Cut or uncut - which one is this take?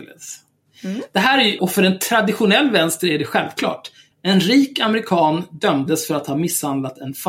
cut